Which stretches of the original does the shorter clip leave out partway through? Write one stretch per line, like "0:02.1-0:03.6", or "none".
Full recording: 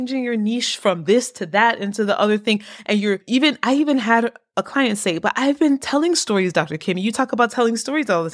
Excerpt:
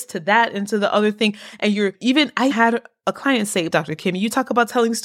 0:03.8-0:04.0
0:05.2-0:06.5